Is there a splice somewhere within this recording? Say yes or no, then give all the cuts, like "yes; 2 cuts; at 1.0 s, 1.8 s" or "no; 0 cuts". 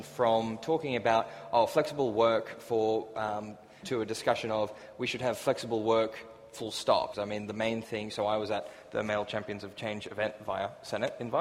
yes; 2 cuts; at 3.8 s, 7.1 s